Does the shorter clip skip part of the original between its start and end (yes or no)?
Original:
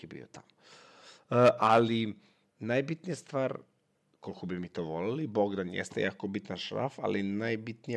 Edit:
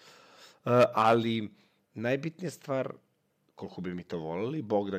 no